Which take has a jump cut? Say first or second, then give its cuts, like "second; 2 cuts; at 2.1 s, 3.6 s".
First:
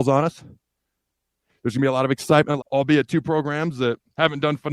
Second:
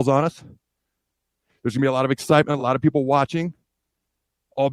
first; 1 cut; at 2.6 s